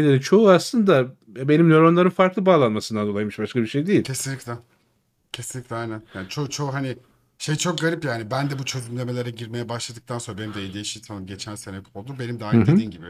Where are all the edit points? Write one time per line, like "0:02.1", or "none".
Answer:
none